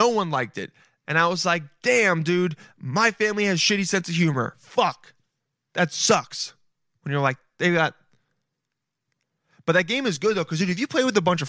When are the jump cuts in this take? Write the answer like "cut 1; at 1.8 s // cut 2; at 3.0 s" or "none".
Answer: cut 1; at 1.0 s